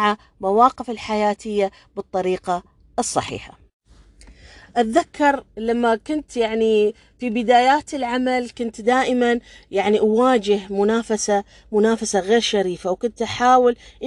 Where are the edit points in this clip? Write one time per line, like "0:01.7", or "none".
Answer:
none